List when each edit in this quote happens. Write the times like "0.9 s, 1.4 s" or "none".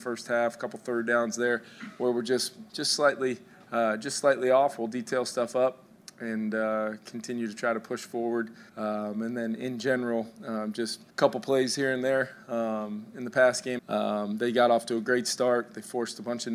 8.7 s, 11.1 s, 13.8 s